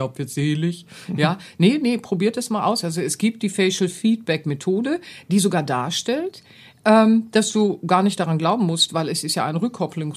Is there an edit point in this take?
no; 0 cuts

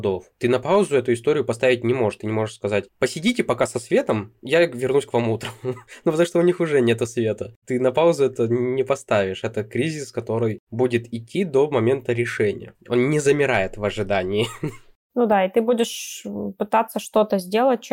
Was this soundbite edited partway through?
no; 0 cuts

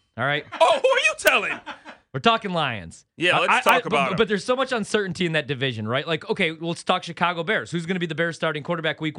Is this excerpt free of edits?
yes; 0 cuts

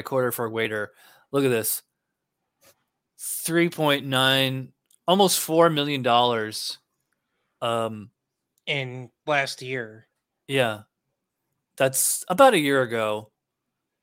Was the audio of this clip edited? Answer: no; 0 cuts

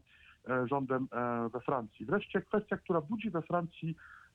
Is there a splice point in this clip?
no; 0 cuts

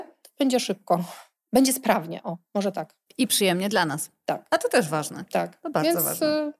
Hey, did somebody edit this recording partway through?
no; 0 cuts

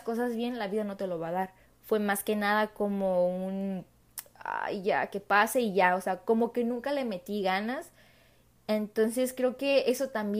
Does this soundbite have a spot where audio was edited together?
yes; 1 cut; at 1.6 s

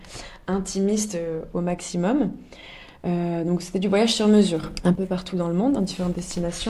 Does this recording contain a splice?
no; 0 cuts

